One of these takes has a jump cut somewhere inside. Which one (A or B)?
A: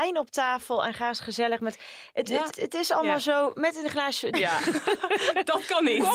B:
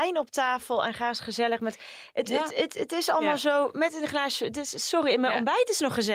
A